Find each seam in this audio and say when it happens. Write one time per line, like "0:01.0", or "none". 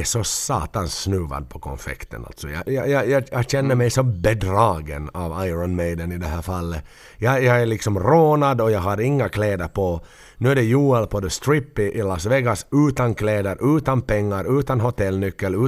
0:02.6